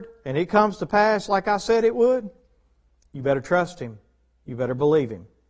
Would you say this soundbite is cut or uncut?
uncut